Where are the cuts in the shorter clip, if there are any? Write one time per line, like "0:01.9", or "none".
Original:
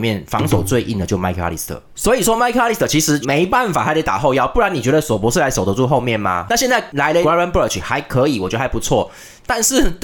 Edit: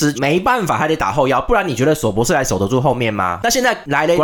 none